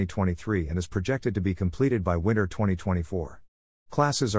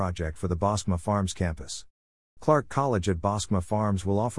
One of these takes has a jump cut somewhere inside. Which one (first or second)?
second